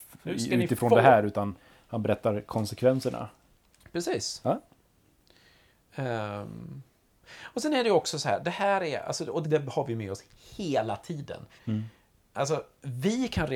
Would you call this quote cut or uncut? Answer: cut